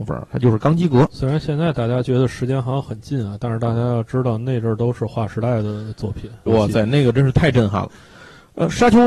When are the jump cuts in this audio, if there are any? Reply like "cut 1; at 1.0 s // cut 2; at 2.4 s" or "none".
cut 1; at 6.5 s